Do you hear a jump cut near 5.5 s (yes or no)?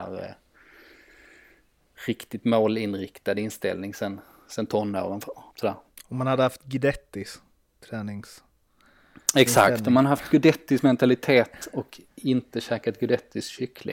yes